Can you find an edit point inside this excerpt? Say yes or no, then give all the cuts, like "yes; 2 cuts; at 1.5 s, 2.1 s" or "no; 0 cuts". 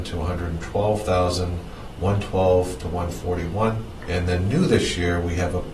yes; 1 cut; at 4.0 s